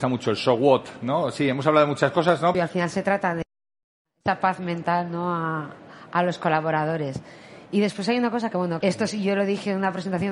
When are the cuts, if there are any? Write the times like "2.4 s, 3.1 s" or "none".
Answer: 2.5 s, 8.8 s